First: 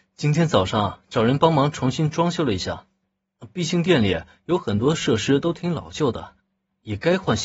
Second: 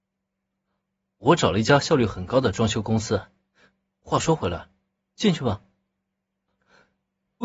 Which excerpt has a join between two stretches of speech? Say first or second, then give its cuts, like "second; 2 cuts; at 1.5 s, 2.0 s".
second; 1 cut; at 5.0 s